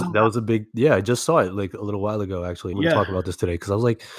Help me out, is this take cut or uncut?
cut